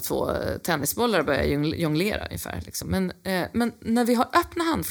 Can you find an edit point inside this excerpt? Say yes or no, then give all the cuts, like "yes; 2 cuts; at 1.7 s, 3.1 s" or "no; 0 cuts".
no; 0 cuts